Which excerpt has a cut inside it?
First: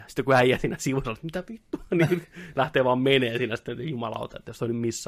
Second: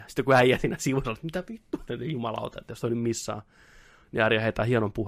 second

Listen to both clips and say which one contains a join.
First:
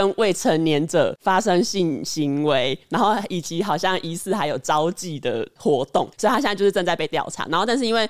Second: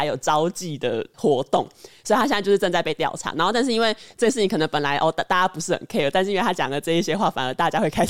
first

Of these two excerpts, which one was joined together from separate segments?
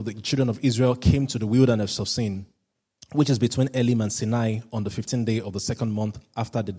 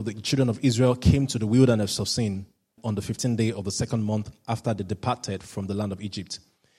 second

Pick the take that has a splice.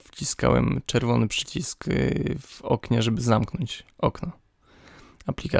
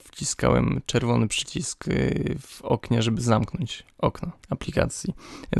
second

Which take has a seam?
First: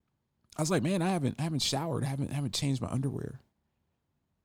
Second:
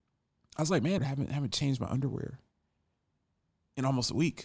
second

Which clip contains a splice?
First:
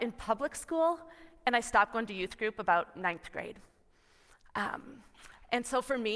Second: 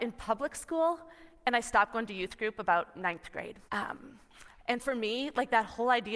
second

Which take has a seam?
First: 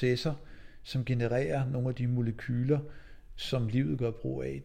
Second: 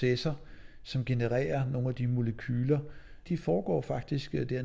second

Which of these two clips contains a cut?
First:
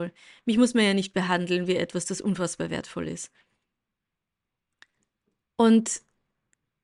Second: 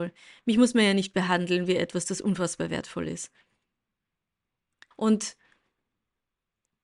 second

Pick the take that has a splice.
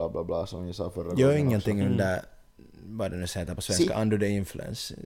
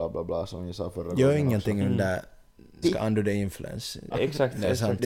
second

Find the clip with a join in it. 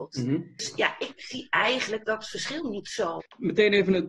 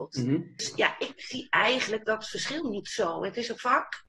first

